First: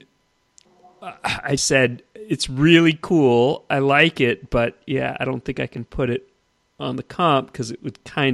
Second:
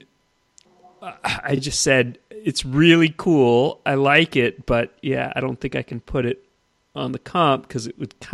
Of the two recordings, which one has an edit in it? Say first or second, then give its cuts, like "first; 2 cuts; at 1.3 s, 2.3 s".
first; 1 cut; at 1.6 s